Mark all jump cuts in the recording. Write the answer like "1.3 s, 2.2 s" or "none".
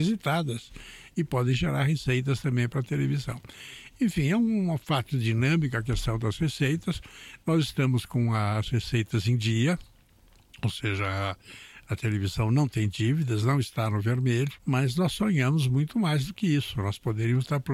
none

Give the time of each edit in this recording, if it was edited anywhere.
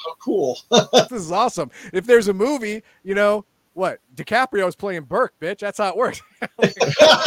1.1 s

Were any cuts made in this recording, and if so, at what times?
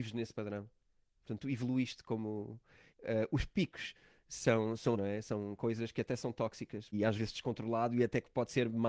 2.9 s, 4.9 s, 6.9 s

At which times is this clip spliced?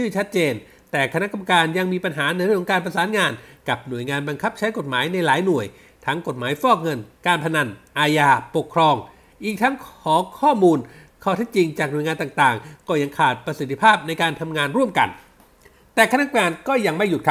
none

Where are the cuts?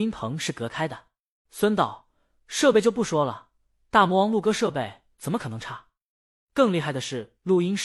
1.4 s

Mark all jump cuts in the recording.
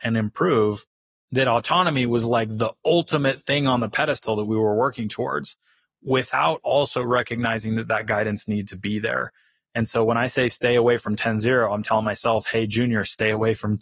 none

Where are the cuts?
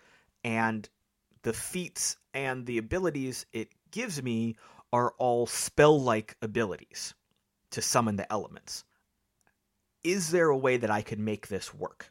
none

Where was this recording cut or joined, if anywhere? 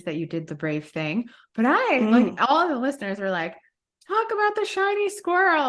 none

